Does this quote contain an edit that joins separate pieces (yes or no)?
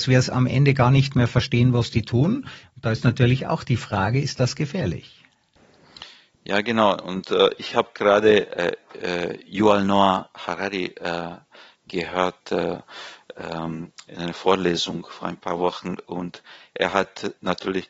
no